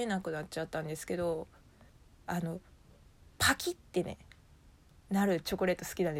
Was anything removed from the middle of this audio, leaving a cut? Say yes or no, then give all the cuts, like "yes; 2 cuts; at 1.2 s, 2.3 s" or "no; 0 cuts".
no; 0 cuts